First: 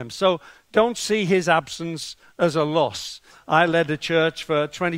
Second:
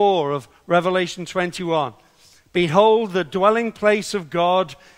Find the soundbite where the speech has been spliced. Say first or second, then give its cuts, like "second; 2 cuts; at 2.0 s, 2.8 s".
first; 1 cut; at 3.3 s